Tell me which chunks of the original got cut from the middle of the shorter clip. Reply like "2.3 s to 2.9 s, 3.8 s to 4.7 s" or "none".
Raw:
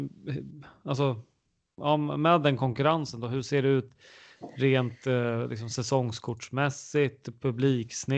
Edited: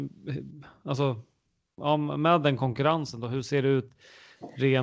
none